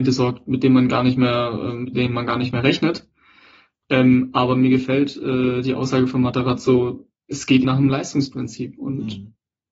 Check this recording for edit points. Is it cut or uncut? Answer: cut